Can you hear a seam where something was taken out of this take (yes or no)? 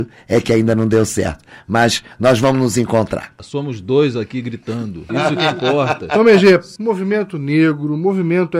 yes